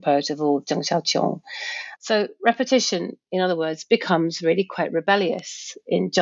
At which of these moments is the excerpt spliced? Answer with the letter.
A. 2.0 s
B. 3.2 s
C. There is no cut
A